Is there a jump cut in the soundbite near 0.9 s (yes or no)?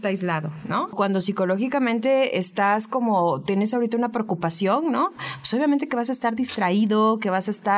yes